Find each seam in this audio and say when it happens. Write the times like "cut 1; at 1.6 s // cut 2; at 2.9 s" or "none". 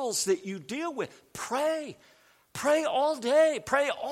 none